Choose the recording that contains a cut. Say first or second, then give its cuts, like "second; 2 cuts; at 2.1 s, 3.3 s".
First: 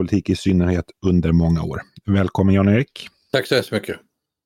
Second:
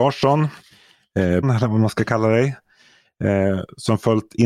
second; 1 cut; at 1.4 s